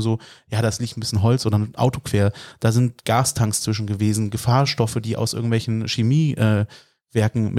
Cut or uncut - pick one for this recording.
uncut